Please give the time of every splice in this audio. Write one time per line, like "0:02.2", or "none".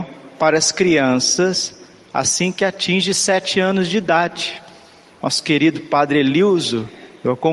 0:05.2